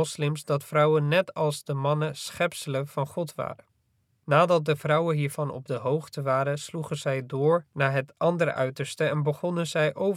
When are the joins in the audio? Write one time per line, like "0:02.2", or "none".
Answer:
0:04.1
0:07.7